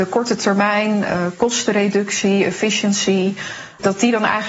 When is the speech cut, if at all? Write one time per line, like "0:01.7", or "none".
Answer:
none